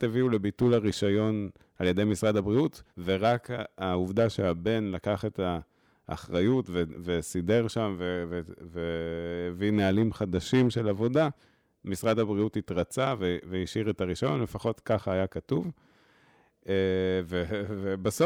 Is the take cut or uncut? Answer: cut